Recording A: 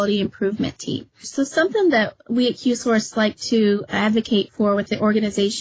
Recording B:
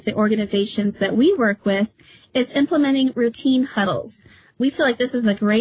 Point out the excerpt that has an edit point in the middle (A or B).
A